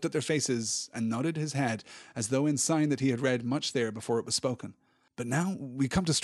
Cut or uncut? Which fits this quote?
cut